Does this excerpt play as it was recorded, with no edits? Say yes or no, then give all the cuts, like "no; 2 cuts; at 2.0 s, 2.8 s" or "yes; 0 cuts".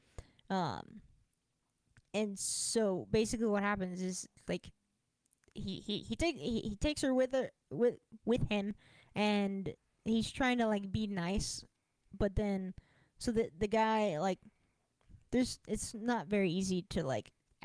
yes; 0 cuts